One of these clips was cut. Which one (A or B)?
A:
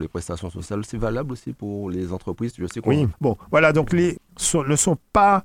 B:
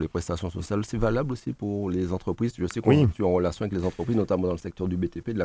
A